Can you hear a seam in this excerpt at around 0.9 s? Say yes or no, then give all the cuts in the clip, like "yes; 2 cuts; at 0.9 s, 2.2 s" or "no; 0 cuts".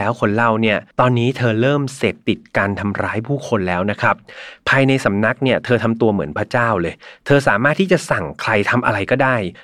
yes; 1 cut; at 0.9 s